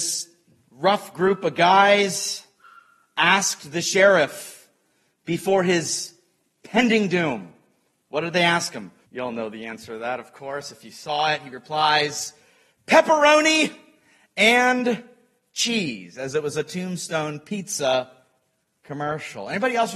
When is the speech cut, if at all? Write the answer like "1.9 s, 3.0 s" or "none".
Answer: 9.0 s